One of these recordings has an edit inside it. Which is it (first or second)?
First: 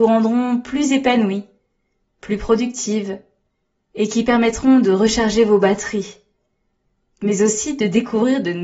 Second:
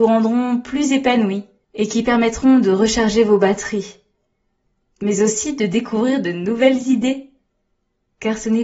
second